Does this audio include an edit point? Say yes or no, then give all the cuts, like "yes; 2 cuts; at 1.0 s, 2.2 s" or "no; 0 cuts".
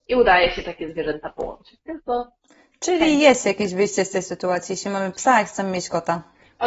no; 0 cuts